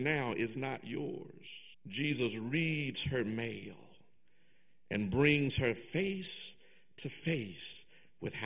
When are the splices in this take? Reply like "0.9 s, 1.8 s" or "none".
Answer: 1.7 s